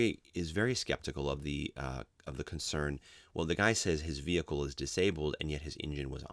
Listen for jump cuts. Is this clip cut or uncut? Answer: uncut